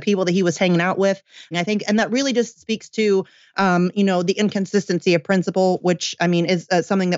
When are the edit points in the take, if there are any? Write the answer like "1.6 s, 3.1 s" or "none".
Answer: 1.5 s